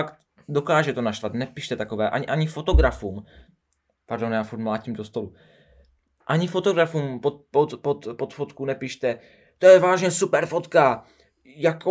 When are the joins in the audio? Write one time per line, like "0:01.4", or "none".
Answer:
none